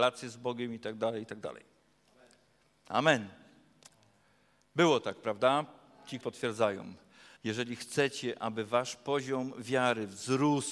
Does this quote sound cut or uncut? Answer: cut